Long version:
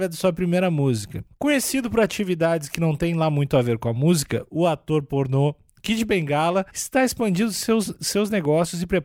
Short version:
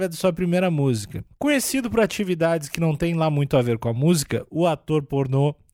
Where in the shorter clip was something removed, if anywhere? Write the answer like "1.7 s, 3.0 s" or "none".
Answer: none

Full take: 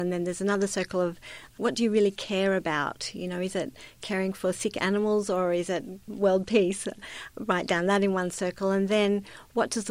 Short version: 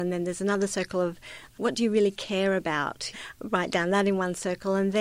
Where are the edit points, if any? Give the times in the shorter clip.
3.1 s

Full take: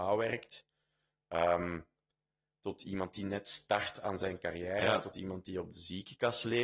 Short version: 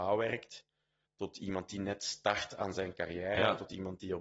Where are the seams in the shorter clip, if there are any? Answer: 1.1 s

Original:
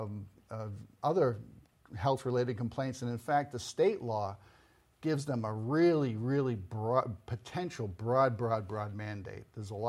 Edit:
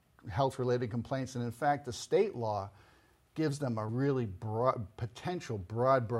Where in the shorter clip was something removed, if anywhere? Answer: 3.9 s

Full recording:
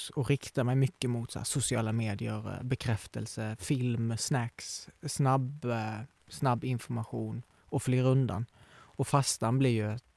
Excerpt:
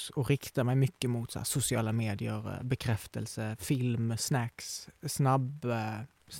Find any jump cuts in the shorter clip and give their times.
none

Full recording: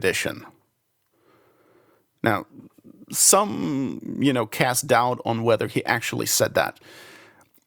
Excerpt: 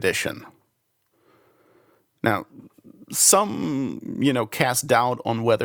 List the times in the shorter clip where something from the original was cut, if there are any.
none

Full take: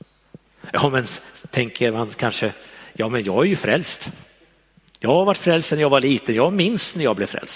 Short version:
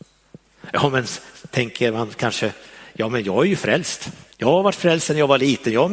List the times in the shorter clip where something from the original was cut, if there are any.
4.3 s

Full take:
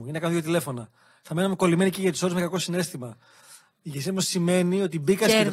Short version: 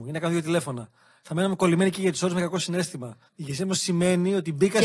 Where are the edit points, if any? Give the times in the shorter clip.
3.3 s

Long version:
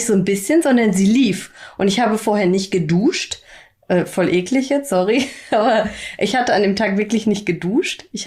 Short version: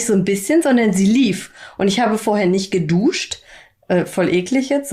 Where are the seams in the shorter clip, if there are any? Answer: none

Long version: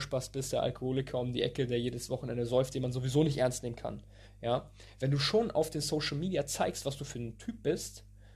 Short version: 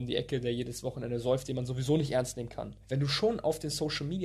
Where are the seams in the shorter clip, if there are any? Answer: 2.8 s

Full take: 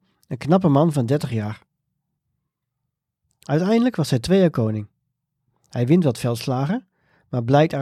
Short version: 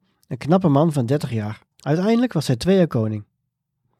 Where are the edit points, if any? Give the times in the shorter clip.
1.7 s

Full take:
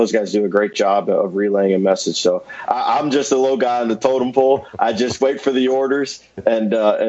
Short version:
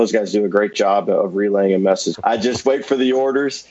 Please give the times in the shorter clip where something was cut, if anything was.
2.1 s

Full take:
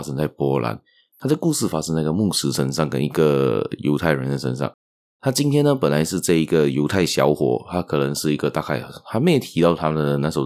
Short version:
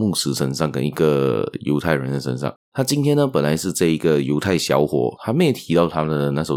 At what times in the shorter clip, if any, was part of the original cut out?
2.6 s, 5.2 s

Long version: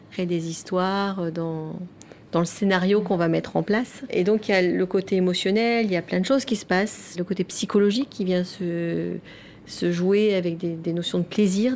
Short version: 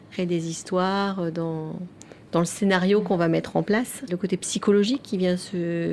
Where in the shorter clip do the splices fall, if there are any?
4.1 s

